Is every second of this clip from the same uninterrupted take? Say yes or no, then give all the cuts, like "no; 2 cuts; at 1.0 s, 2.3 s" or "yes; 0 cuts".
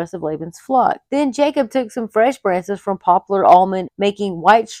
no; 2 cuts; at 1.1 s, 3.8 s